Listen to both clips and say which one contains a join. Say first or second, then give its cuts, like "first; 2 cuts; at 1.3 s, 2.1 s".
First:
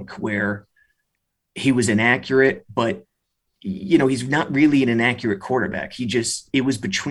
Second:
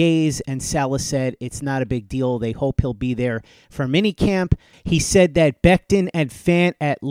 second; 1 cut; at 4.7 s